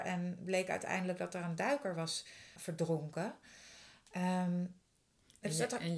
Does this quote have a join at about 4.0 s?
no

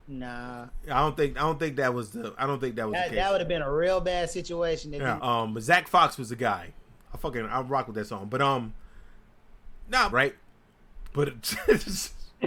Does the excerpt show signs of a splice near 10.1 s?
yes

